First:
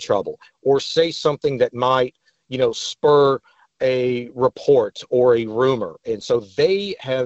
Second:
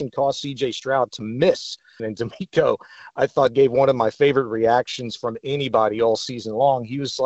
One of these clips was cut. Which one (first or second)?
second